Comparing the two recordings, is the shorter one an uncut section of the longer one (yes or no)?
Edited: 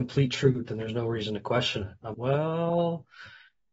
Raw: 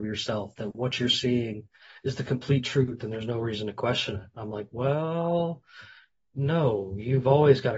no